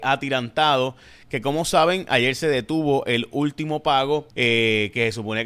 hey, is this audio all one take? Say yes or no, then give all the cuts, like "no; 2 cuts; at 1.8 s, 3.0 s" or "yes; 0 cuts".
no; 1 cut; at 4.3 s